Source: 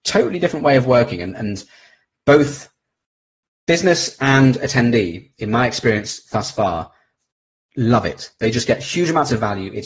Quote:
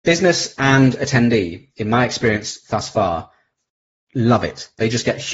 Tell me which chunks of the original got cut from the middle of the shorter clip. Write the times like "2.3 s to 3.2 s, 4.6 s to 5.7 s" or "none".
none